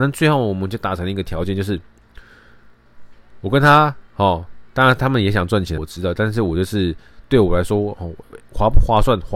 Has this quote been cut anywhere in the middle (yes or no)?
yes